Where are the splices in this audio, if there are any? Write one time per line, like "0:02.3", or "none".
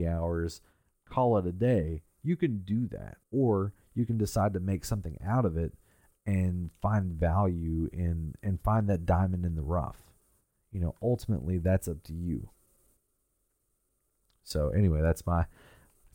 0:03.2